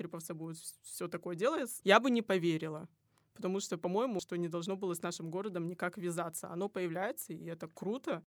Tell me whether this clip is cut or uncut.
cut